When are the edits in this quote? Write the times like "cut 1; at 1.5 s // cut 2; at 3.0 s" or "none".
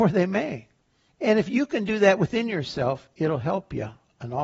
cut 1; at 1.1 s